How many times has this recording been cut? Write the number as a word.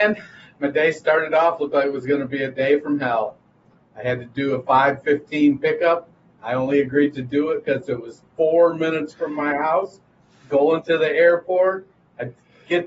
zero